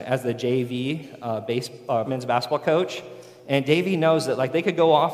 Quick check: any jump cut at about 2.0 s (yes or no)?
yes